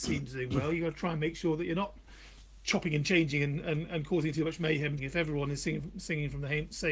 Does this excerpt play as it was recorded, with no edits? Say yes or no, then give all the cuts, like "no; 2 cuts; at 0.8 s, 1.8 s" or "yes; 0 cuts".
no; 1 cut; at 5.0 s